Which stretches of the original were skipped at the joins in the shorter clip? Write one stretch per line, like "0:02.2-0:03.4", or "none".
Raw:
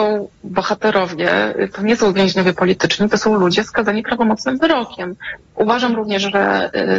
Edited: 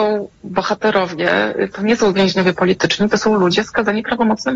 none